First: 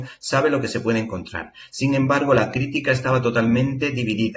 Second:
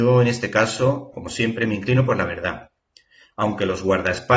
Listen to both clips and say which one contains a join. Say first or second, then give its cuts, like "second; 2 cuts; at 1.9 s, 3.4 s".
second; 1 cut; at 1.1 s